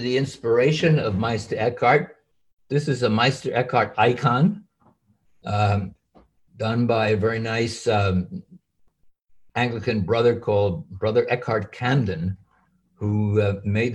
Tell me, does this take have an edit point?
no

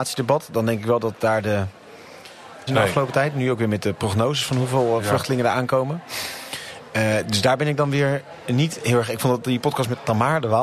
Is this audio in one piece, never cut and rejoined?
no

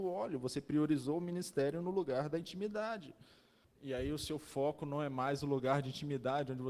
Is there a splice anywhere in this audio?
yes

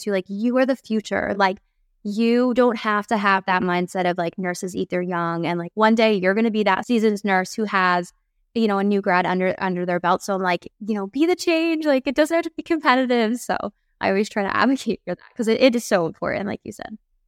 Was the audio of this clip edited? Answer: no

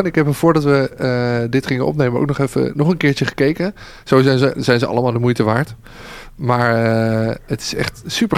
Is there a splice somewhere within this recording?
no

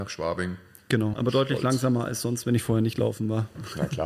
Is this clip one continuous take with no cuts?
no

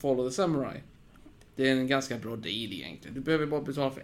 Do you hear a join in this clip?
yes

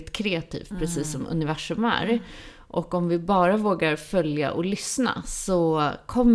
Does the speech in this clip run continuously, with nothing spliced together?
yes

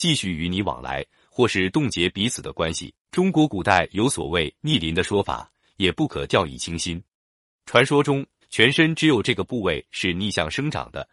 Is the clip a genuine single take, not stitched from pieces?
no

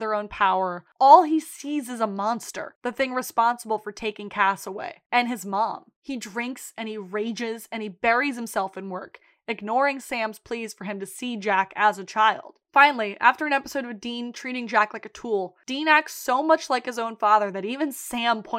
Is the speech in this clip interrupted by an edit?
no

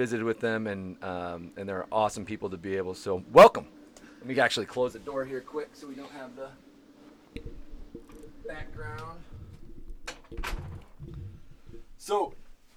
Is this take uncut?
yes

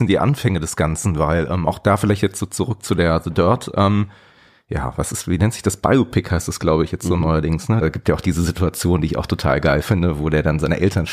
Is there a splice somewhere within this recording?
yes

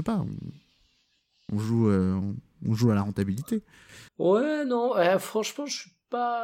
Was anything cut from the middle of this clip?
yes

